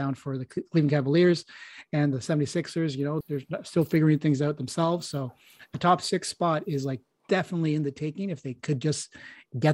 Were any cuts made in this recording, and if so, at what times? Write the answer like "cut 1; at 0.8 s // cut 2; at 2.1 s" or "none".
cut 1; at 3.2 s